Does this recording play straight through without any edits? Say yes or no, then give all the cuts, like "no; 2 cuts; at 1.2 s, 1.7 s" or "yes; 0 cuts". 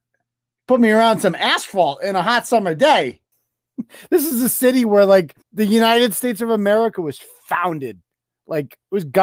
no; 2 cuts; at 3.3 s, 5.4 s